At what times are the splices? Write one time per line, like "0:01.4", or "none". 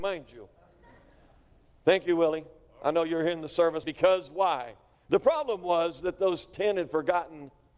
0:03.8
0:05.1